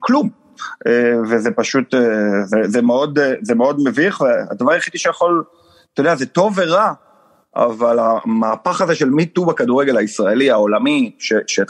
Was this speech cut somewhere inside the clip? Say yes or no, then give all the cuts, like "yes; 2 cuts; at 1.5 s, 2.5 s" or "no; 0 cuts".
no; 0 cuts